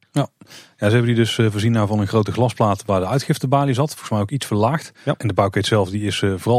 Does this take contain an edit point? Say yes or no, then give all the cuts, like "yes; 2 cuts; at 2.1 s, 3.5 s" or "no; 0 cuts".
yes; 1 cut; at 5.2 s